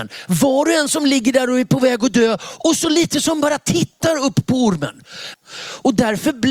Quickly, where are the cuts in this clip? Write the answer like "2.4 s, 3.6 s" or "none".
5.3 s